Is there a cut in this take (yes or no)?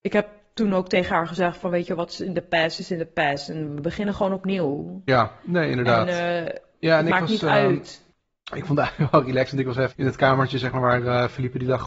yes